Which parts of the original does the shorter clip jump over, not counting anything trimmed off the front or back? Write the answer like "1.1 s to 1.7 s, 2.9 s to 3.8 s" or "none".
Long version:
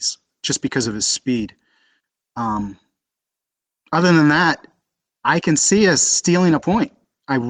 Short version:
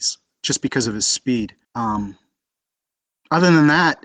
1.6 s to 2.3 s